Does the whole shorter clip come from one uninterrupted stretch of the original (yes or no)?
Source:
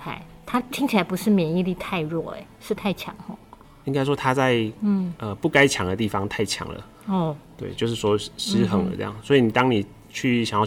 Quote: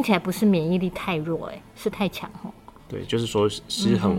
no